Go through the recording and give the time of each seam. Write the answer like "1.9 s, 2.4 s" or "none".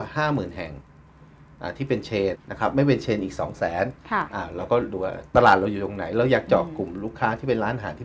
2.3 s